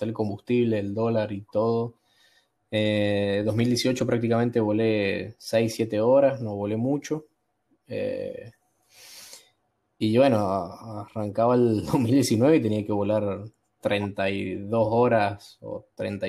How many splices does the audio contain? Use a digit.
1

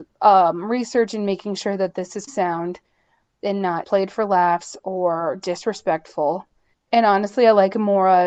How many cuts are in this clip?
3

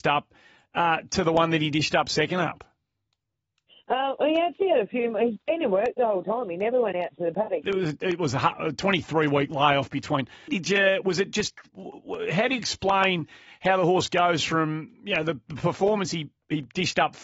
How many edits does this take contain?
2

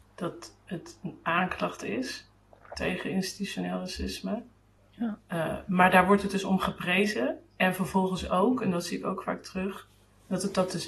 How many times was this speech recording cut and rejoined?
1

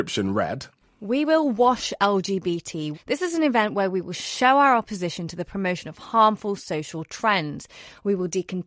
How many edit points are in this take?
1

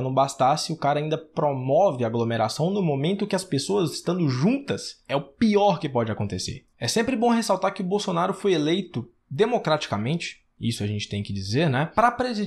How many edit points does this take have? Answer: 1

